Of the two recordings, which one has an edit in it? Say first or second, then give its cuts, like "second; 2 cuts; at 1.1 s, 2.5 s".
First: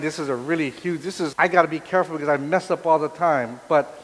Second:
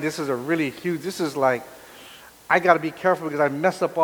first; 1 cut; at 1.3 s